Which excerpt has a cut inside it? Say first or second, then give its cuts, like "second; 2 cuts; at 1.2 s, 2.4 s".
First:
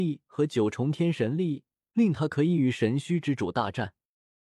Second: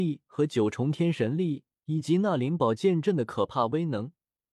first; 1 cut; at 1.8 s